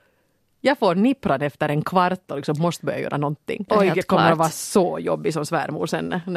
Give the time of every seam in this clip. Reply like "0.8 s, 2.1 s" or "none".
3.7 s